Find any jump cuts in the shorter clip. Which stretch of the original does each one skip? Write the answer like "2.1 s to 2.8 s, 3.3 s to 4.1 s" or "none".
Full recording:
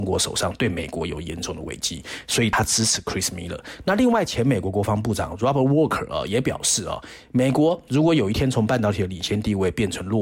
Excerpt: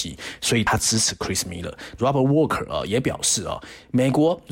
3.8 s to 5.4 s